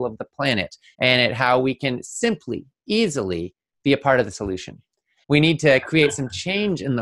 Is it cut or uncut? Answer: cut